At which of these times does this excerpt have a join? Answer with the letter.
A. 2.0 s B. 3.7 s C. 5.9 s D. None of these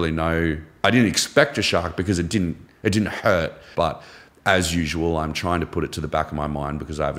B